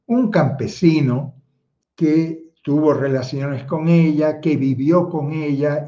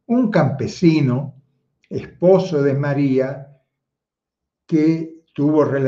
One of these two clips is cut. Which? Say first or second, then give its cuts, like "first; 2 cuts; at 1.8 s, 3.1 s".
first; 1 cut; at 1.8 s